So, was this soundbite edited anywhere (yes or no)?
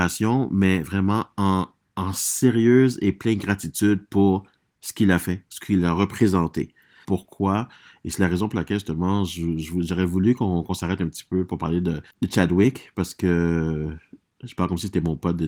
yes